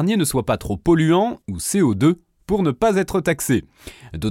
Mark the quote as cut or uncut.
cut